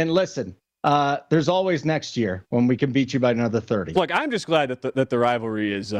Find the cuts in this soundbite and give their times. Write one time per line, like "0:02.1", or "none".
0:03.9